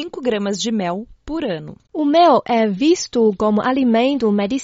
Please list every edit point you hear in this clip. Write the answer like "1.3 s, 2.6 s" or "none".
1.9 s